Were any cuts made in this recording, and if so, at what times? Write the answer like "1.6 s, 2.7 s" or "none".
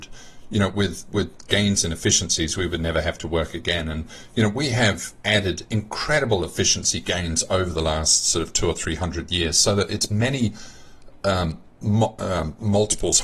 none